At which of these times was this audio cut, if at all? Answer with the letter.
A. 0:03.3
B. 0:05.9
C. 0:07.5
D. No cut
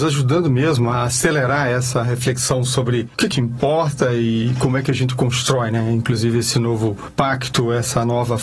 A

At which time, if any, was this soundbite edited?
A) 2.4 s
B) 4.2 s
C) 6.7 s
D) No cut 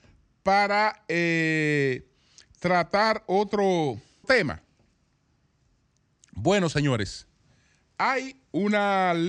B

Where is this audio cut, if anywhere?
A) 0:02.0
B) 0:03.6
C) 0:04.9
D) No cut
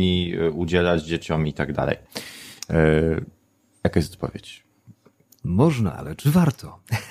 D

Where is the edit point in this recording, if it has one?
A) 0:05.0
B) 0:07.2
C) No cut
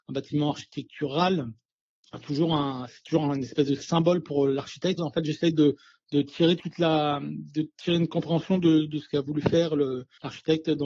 A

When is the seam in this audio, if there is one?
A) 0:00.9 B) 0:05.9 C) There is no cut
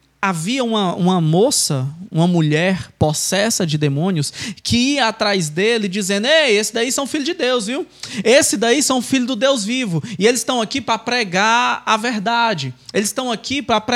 C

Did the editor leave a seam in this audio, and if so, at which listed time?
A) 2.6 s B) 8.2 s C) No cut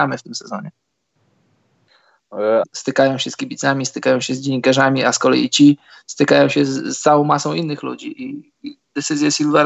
A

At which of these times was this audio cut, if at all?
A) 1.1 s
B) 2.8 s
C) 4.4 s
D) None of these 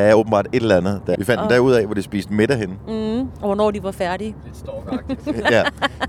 A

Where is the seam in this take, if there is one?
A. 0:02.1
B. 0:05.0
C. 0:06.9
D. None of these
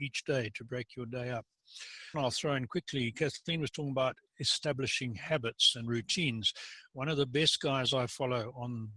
A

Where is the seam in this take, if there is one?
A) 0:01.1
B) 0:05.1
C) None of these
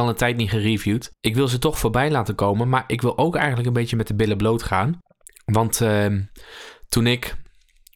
C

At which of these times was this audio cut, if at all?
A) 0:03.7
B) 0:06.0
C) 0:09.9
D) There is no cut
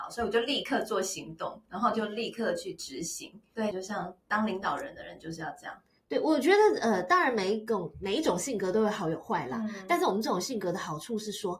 A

